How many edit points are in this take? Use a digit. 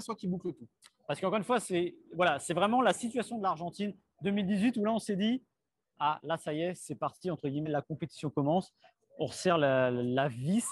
0